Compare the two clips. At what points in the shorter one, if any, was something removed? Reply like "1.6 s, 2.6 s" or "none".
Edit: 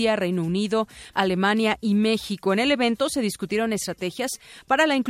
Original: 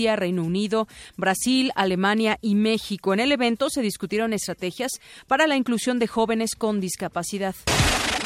1.1 s